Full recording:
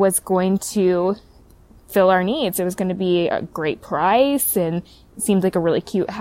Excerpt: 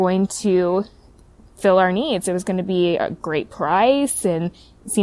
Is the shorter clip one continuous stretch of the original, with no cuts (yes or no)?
yes